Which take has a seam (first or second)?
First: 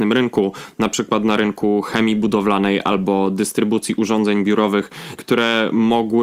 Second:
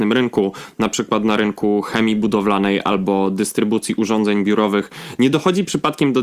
first